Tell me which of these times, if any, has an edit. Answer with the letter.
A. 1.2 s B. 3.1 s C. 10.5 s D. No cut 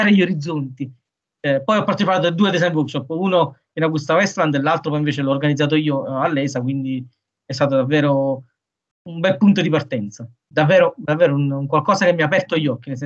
C